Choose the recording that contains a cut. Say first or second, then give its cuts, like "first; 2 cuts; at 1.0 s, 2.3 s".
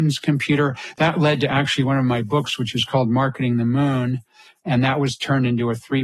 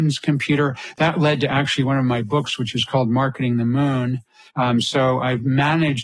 second; 1 cut; at 4.5 s